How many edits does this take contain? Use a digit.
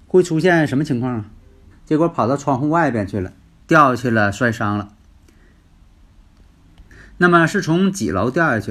2